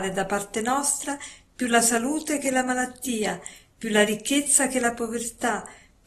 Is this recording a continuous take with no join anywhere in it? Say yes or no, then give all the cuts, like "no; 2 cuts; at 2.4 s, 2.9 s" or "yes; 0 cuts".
yes; 0 cuts